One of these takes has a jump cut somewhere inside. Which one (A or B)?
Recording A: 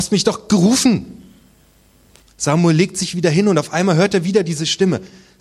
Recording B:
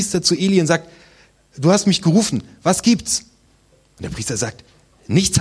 A